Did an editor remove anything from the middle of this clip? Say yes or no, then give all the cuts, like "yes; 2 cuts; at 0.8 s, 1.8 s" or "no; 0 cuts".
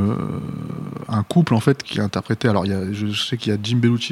yes; 1 cut; at 1.8 s